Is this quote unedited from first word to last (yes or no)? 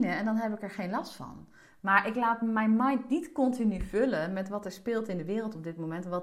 yes